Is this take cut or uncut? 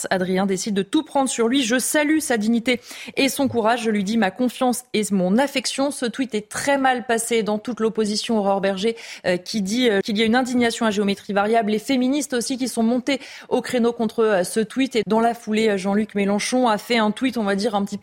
cut